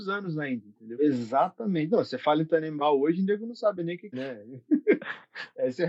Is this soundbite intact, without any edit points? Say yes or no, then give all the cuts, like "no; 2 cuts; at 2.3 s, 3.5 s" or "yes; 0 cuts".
no; 2 cuts; at 1.0 s, 4.1 s